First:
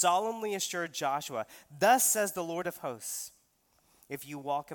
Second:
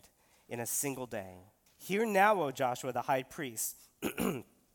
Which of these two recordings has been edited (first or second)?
second